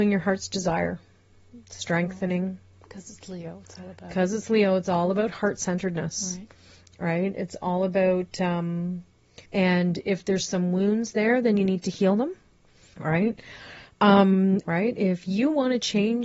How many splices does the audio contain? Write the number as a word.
three